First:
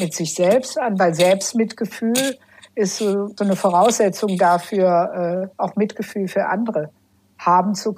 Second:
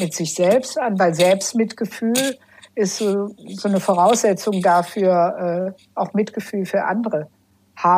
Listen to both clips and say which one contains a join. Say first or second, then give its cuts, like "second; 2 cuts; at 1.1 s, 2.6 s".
first; 2 cuts; at 3.4 s, 5.5 s